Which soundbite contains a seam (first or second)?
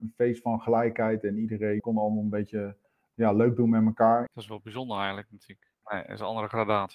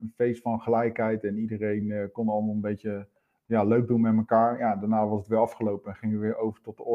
first